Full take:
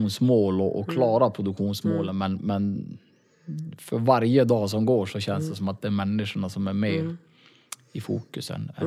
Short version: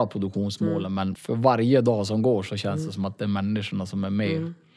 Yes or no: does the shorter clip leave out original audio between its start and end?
yes